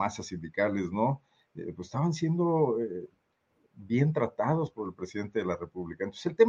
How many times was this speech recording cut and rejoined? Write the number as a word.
zero